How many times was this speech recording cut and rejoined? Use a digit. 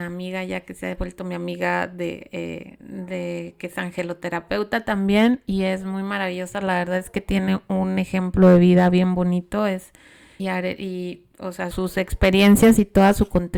2